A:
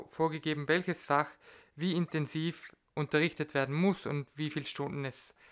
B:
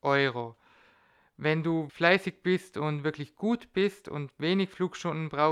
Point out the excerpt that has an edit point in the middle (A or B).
B